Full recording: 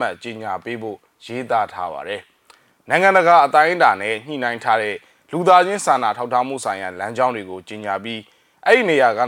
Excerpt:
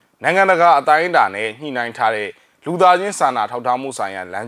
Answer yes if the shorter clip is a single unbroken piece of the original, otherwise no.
yes